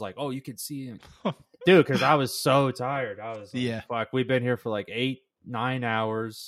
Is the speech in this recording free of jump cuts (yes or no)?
no